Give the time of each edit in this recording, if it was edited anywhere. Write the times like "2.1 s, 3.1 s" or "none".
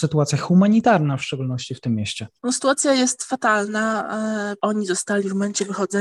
4.6 s